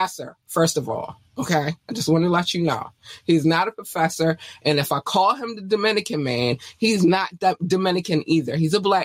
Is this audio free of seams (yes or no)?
yes